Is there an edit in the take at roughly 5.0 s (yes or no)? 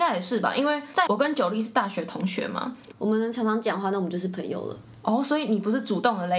no